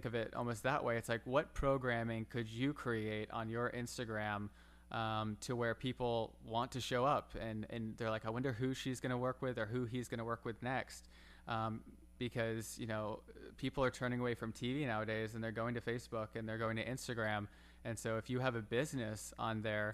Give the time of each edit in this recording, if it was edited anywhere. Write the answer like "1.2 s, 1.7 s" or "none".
12.2 s